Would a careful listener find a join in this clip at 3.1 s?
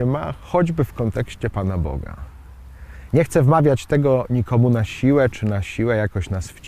yes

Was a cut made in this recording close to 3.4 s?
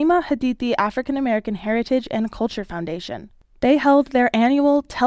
no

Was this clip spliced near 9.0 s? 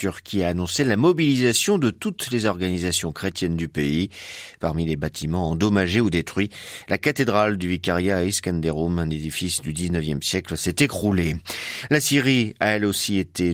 no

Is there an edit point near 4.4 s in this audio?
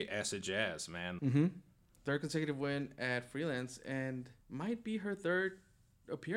yes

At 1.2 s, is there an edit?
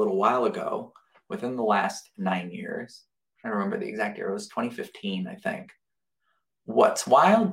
no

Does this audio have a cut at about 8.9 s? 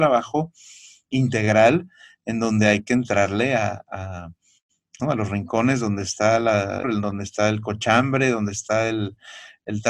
no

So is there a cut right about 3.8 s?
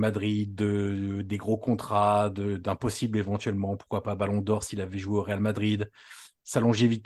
no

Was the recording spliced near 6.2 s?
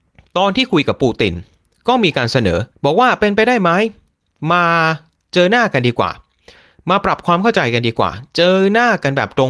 no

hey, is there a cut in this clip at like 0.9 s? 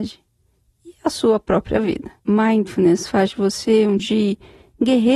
no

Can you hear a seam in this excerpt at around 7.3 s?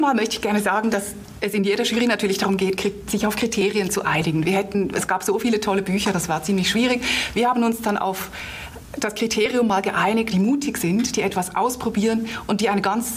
no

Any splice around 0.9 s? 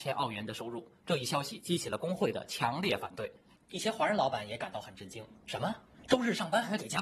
no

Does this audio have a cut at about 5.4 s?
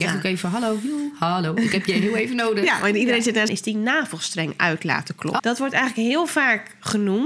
yes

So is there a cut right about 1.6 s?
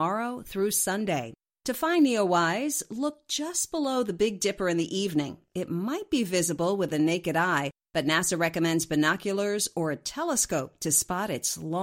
no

